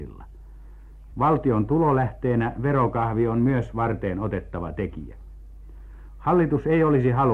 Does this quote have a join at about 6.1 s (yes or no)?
no